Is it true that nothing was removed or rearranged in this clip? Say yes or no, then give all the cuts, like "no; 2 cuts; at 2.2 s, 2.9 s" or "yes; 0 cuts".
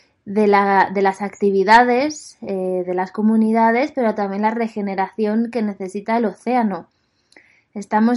yes; 0 cuts